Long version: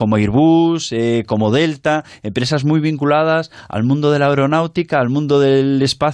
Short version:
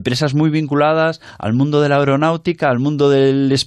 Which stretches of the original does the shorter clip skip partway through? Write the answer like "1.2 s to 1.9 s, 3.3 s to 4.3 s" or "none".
none

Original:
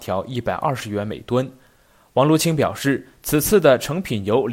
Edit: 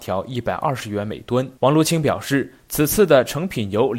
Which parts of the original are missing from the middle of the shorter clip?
1.6 s to 2.1 s

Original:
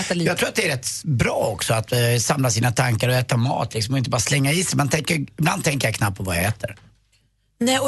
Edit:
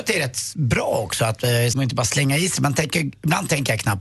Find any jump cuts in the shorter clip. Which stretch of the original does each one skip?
2.2 s to 3.9 s

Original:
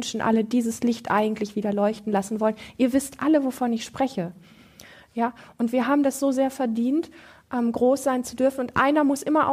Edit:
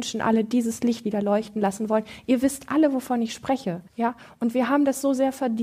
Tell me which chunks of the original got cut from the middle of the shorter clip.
1.0 s to 1.5 s, 4.4 s to 5.0 s

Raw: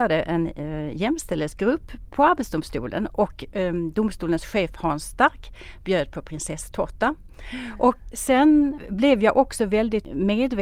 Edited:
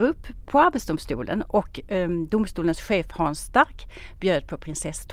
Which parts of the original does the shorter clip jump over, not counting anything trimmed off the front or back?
none

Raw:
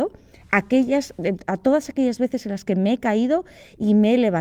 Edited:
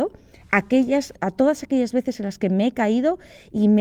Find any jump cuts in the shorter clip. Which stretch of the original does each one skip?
1.2 s to 1.4 s

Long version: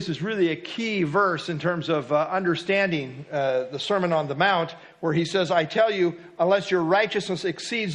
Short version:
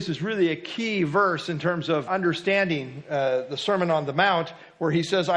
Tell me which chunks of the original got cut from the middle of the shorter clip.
2.1 s to 2.3 s

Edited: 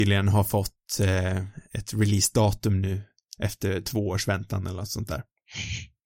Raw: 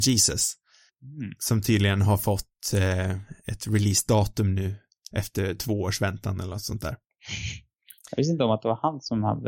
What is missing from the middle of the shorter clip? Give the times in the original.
none

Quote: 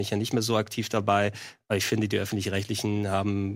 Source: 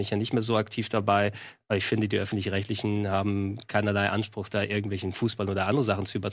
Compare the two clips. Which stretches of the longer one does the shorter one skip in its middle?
none

